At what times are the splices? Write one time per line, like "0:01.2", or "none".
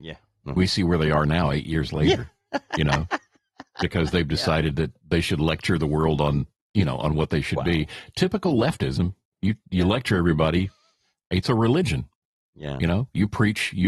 0:09.4